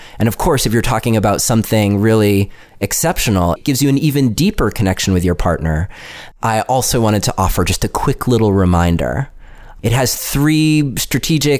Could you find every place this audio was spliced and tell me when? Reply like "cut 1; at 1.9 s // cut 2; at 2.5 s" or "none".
cut 1; at 3.6 s // cut 2; at 6.3 s // cut 3; at 9.8 s